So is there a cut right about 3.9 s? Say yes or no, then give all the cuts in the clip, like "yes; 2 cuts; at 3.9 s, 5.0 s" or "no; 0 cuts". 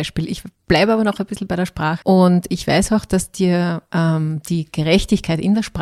no; 1 cut; at 2.0 s